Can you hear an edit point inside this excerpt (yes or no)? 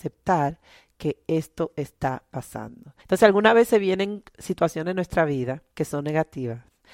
yes